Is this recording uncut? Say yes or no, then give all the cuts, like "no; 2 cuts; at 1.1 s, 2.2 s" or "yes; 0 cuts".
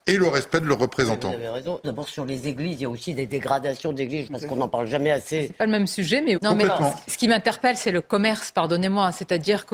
no; 3 cuts; at 1.8 s, 4.3 s, 6.4 s